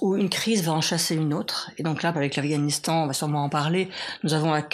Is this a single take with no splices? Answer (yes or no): no